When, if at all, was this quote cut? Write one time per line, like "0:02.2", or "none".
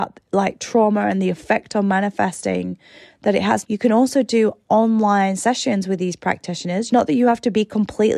0:03.6
0:06.9